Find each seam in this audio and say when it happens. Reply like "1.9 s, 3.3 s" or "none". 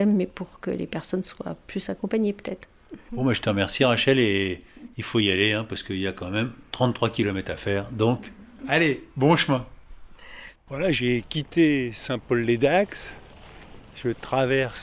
10.6 s